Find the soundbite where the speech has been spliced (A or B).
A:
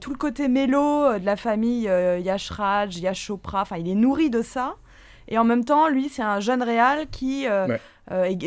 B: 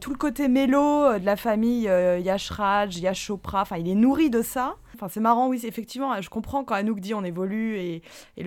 B